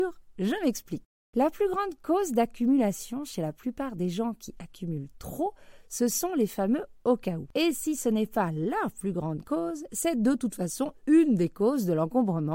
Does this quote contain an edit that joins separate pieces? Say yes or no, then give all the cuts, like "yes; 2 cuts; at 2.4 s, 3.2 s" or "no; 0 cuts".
no; 0 cuts